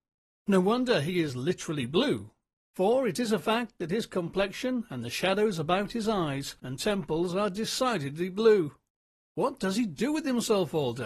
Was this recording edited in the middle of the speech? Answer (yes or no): no